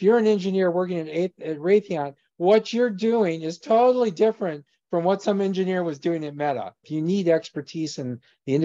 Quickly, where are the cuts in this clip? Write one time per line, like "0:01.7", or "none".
0:06.8

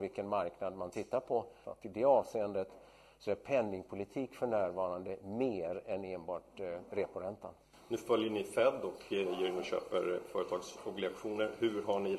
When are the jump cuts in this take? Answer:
0:01.6

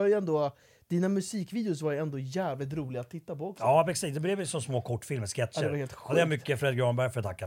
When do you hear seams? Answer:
none

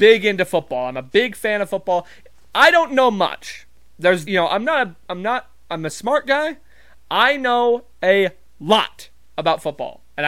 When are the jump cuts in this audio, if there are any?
0:04.2
0:06.9

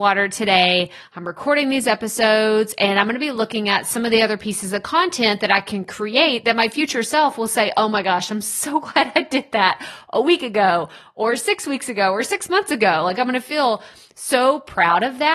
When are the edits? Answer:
none

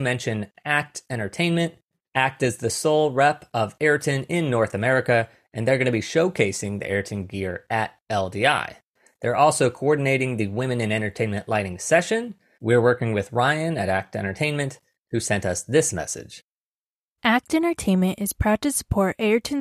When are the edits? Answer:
none

